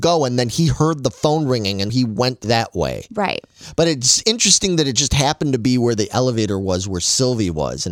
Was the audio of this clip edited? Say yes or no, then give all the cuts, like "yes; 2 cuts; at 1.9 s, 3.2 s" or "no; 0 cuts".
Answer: yes; 1 cut; at 1.9 s